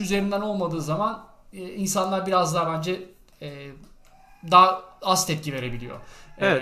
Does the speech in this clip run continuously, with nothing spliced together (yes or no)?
yes